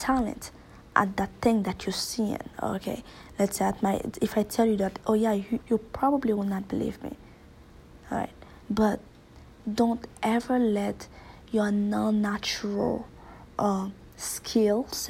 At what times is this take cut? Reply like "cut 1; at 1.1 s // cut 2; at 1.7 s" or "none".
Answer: cut 1; at 5.6 s